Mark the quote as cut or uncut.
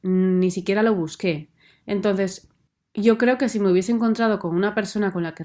uncut